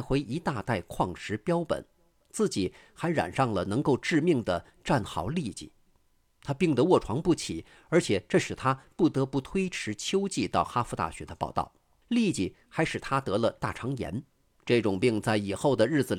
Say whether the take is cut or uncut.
cut